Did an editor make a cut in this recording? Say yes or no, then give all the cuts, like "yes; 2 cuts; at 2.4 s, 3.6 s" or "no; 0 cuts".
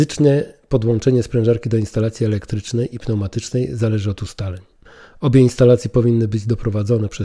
no; 0 cuts